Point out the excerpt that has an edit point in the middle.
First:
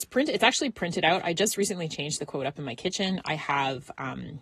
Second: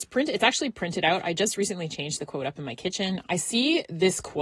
second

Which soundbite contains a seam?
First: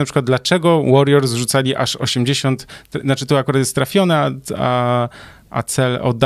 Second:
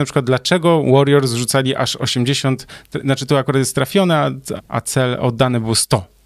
second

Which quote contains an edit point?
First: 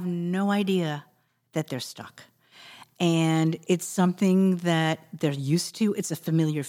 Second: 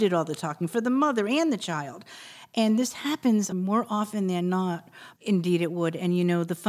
second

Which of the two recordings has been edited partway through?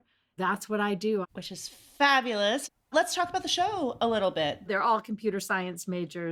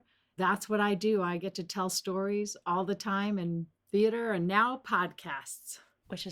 first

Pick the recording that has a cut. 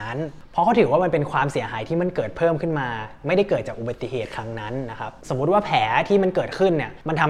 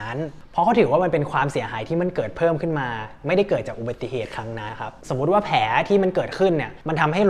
second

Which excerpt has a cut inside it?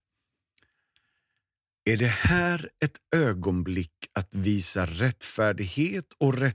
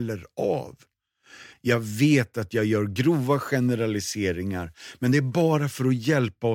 second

